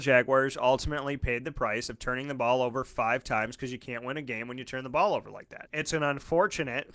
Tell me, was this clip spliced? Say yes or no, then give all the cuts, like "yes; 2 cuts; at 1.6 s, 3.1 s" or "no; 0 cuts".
yes; 1 cut; at 5.7 s